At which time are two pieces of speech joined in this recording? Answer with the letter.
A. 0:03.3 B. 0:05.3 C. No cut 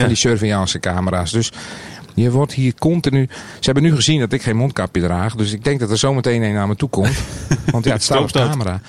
C